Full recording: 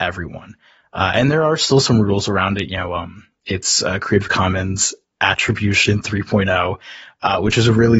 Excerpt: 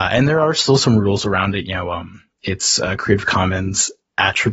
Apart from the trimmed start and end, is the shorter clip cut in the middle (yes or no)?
no